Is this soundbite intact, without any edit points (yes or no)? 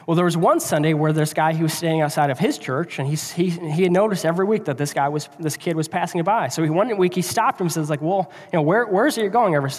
yes